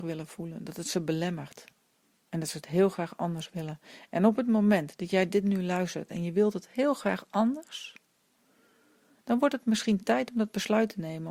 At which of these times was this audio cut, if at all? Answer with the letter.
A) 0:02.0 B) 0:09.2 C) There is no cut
C